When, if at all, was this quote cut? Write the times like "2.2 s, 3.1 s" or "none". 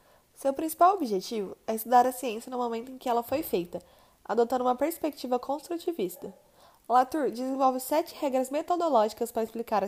none